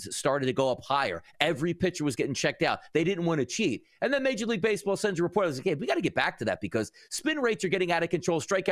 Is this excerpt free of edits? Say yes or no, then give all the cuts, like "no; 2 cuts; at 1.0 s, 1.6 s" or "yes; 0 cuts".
yes; 0 cuts